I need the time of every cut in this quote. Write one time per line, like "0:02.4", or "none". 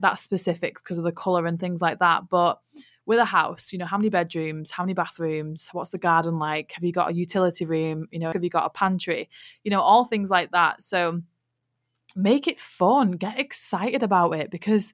0:08.3